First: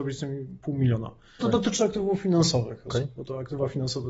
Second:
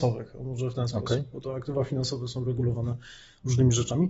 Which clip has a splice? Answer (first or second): first